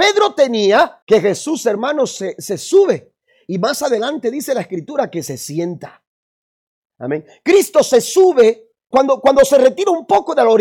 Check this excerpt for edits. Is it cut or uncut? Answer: cut